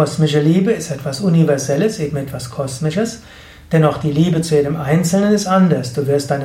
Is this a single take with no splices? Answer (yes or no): yes